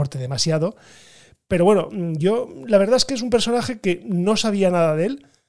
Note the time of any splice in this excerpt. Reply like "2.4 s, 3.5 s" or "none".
none